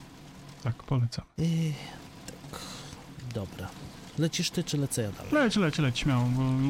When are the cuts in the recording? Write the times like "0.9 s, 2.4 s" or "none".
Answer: none